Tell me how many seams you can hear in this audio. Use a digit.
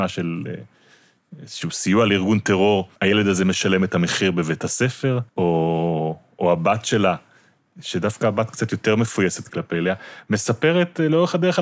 3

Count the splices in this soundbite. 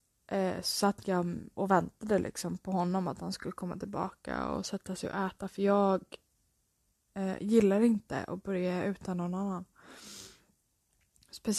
0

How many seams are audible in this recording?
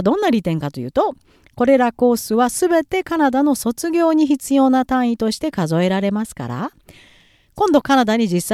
0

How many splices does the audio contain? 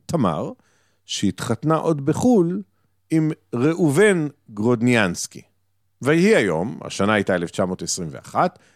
0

